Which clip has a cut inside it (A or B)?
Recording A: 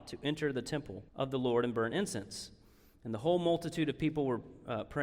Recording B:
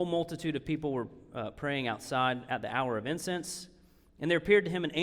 A